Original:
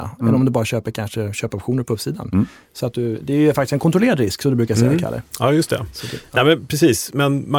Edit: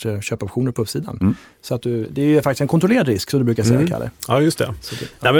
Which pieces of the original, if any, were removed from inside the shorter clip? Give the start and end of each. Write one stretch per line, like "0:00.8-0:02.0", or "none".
none